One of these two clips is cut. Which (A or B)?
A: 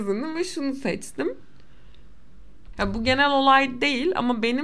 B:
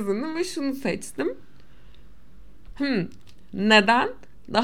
A